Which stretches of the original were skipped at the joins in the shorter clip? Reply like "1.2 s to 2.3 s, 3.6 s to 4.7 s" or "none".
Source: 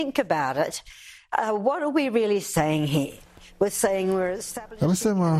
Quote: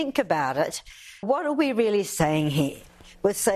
1.2 s to 1.6 s